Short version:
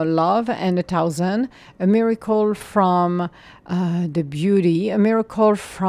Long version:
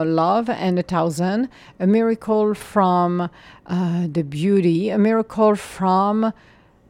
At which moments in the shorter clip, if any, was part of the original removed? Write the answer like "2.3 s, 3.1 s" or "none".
none